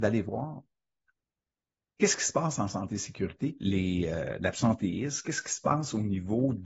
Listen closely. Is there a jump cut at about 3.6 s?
yes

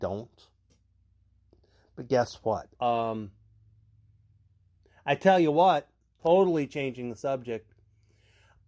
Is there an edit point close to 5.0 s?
no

